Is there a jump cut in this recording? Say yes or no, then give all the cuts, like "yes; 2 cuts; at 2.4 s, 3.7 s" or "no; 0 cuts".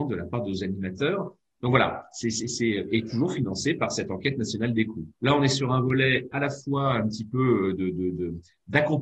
yes; 1 cut; at 5.2 s